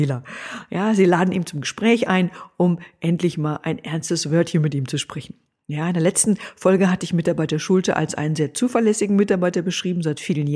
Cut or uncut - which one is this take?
uncut